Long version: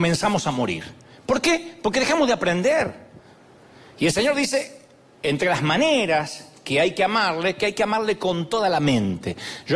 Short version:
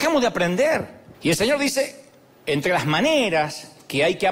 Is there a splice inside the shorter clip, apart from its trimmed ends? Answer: yes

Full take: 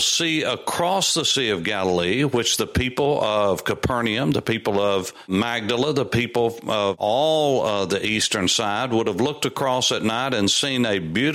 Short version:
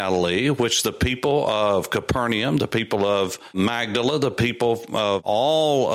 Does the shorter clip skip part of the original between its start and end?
no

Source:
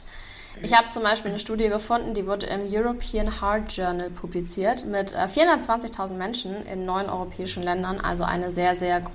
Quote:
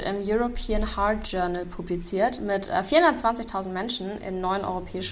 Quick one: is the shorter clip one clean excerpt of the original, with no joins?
yes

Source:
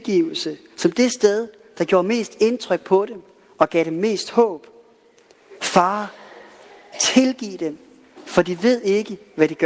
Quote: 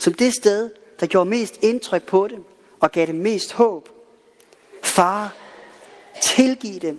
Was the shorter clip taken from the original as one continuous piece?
yes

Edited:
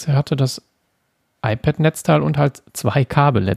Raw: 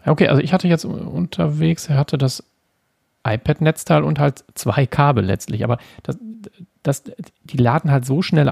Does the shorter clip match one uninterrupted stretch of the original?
yes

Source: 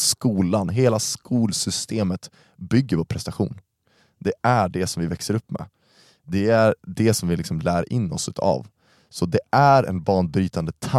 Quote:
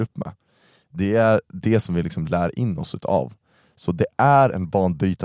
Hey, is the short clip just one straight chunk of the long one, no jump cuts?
yes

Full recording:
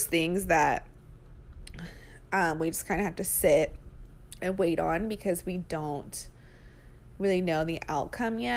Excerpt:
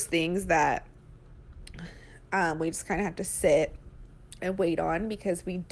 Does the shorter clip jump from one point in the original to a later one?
no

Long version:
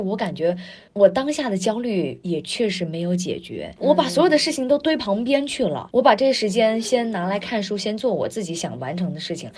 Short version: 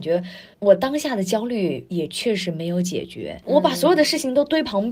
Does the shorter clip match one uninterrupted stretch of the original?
yes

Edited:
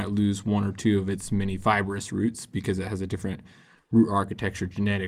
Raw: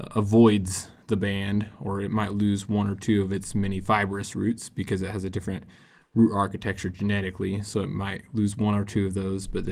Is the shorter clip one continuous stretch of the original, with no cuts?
yes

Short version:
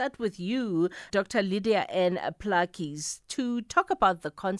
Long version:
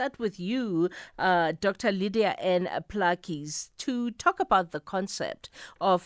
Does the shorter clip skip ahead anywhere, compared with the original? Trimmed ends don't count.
yes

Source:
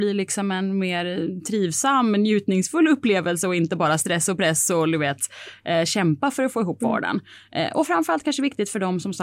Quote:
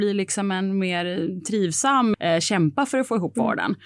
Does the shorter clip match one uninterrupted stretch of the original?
no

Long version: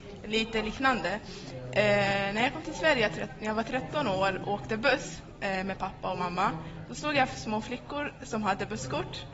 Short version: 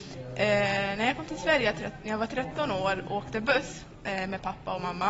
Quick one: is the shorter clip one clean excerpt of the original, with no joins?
yes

